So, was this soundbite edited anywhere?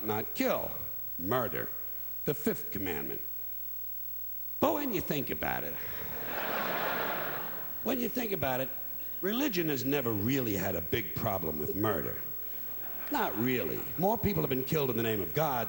no; 0 cuts

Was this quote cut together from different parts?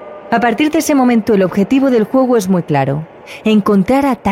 no; 0 cuts

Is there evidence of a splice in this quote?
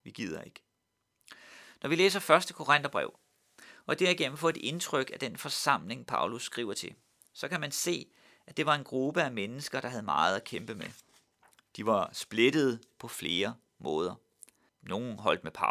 yes; 1 cut; at 14.7 s

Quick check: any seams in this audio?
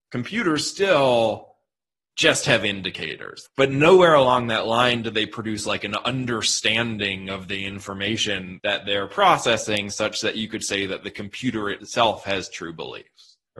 yes; 1 cut; at 3.4 s

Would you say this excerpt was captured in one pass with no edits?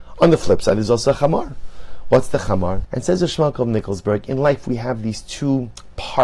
no; 1 cut; at 2.8 s

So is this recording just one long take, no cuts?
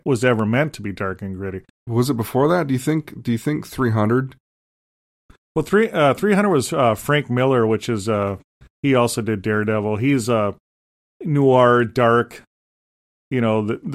no; 1 cut; at 1.7 s

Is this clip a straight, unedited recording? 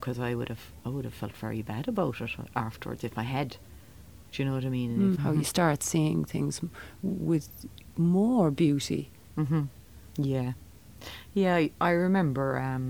no; 1 cut; at 5.1 s

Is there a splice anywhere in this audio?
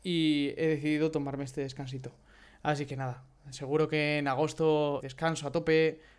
yes; 1 cut; at 5.0 s

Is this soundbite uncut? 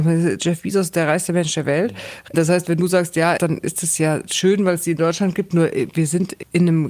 no; 2 cuts; at 2.3 s, 3.4 s

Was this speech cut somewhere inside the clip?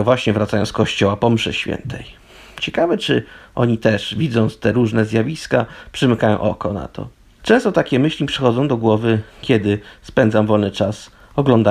yes; 1 cut; at 7.4 s

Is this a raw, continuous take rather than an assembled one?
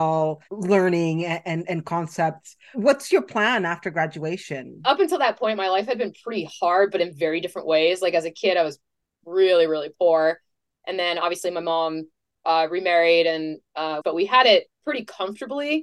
no; 1 cut; at 14.0 s

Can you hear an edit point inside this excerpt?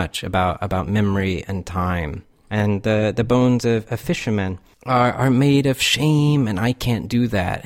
no; 0 cuts

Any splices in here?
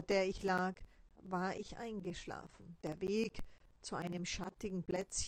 no; 0 cuts

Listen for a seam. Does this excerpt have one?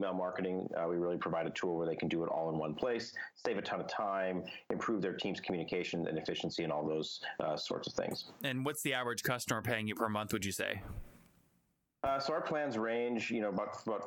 no; 0 cuts

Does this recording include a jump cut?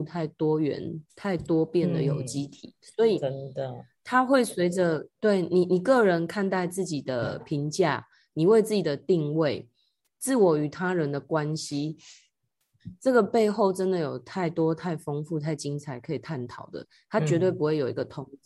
no; 0 cuts

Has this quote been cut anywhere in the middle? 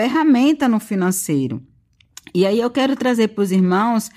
no; 0 cuts

